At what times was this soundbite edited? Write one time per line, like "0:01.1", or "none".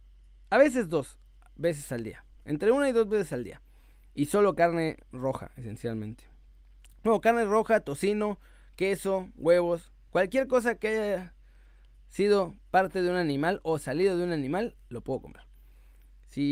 none

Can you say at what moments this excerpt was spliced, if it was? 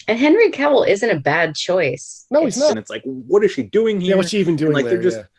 0:02.7

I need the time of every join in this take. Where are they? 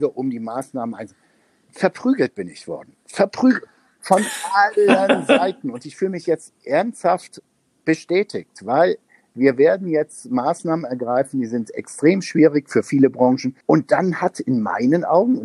0:13.6

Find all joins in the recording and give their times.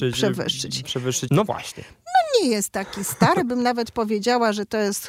0:01.3

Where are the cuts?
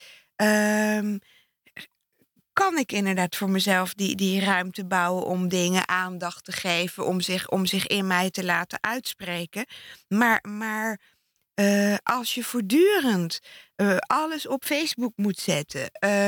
none

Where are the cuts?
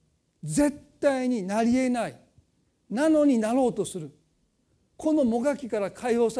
none

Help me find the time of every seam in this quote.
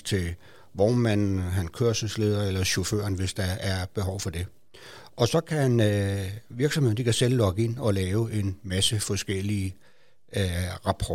none

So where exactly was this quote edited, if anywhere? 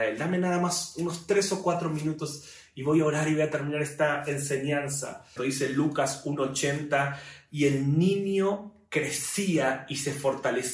0:05.4

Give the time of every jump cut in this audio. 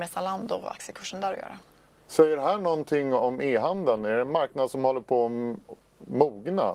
none

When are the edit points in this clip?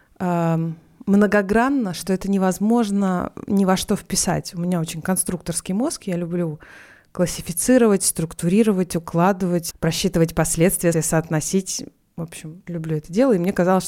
0:09.7
0:10.9
0:12.7

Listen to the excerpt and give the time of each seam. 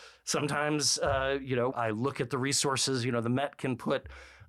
0:01.7

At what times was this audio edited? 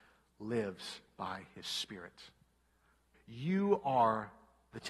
0:03.1

